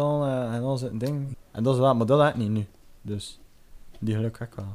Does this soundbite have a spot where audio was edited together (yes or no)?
yes